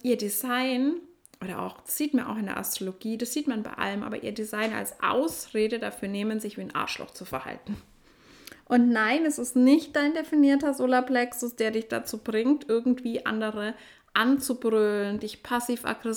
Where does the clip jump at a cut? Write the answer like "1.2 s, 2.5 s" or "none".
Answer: none